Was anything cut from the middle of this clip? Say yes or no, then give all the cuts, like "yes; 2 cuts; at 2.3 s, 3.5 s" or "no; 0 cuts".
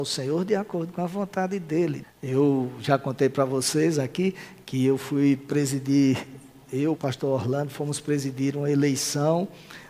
yes; 2 cuts; at 2.0 s, 7.0 s